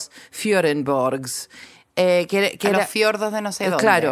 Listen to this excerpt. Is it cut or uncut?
uncut